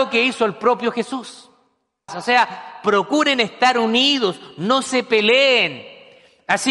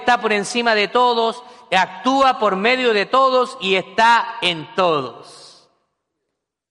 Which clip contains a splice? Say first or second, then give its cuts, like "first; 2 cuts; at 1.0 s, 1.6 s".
first; 1 cut; at 2.1 s